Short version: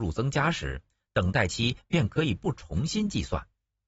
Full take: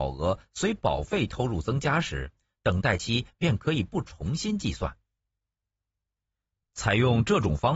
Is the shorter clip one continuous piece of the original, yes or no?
yes